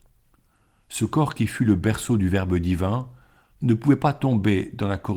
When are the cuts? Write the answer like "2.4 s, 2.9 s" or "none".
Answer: 3.5 s